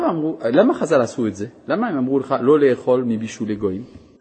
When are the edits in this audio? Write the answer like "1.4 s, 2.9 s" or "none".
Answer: none